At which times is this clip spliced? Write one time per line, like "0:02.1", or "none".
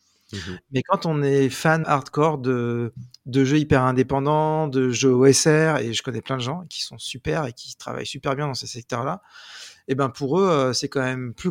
0:01.8